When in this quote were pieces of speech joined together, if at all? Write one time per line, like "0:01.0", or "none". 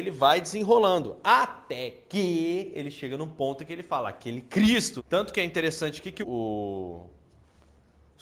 0:05.0
0:06.2